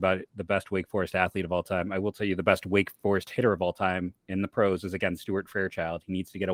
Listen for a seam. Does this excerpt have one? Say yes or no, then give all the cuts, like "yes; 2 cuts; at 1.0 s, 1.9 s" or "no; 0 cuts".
no; 0 cuts